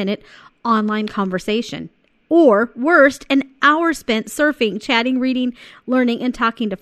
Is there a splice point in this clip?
no; 0 cuts

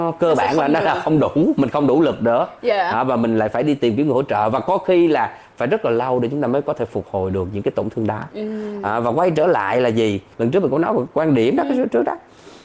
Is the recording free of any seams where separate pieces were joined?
yes; 0 cuts

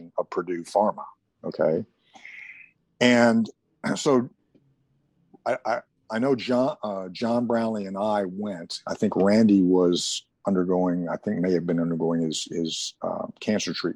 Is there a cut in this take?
no; 0 cuts

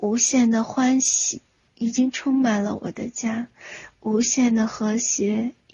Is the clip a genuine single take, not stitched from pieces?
yes; 0 cuts

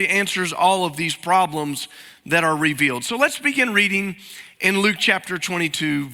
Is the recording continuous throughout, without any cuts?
yes; 0 cuts

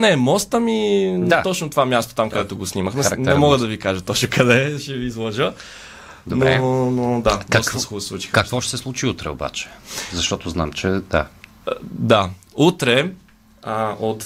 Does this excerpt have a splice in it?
no; 0 cuts

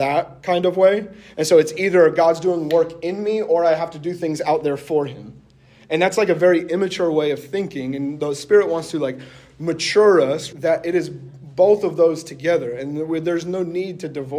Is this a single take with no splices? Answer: no; 1 cut; at 10.5 s

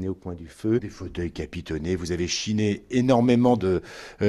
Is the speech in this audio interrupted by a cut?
no; 0 cuts

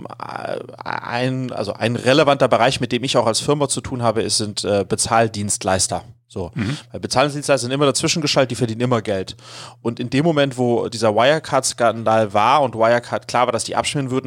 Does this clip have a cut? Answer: no; 0 cuts

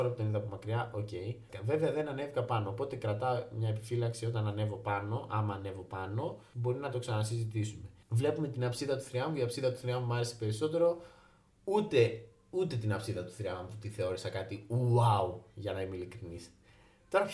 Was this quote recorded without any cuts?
yes; 0 cuts

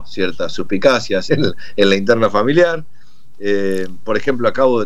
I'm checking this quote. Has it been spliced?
yes; 1 cut; at 1.3 s

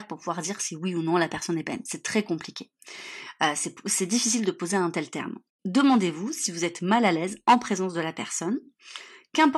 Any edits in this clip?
no; 0 cuts

